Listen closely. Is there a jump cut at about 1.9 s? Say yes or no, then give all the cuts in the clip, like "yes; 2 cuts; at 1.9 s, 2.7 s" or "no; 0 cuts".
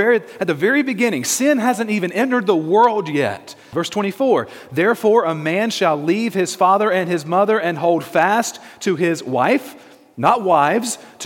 no; 1 cut; at 3.7 s